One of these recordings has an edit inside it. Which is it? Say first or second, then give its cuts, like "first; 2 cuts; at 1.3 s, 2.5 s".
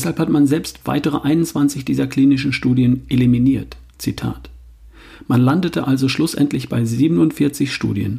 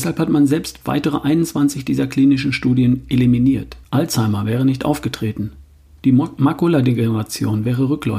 second; 1 cut; at 3.8 s